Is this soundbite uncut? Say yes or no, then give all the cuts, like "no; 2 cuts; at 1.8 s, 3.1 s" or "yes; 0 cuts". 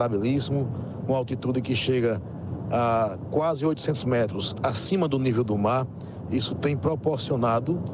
yes; 0 cuts